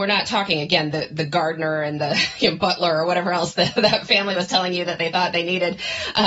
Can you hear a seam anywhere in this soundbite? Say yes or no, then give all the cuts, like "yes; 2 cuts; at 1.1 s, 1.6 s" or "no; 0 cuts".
no; 0 cuts